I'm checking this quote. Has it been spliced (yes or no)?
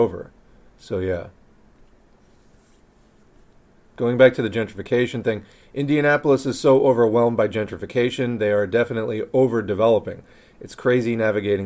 no